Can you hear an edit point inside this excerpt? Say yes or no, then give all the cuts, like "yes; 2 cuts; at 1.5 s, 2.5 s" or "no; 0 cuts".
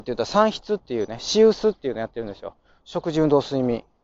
no; 0 cuts